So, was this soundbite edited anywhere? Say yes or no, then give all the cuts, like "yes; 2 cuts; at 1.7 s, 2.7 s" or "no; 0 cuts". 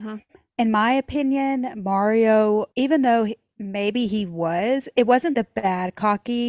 yes; 2 cuts; at 2.7 s, 5.3 s